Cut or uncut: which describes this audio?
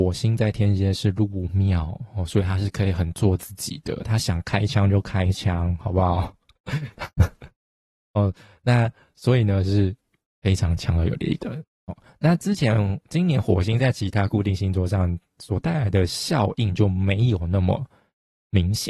uncut